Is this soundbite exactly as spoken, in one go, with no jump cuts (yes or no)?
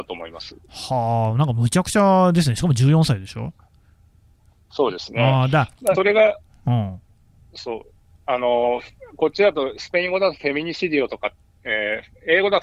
no